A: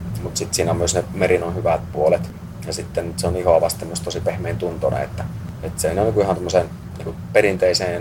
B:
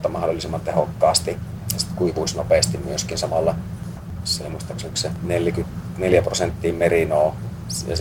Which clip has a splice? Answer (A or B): B